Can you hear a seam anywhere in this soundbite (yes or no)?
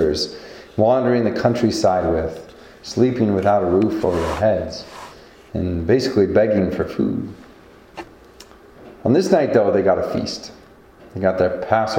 no